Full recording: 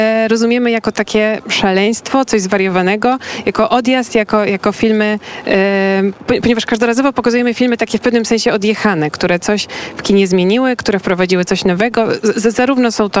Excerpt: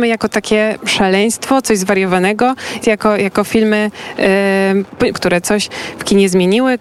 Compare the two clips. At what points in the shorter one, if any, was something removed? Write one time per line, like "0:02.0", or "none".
0:02.8
0:05.1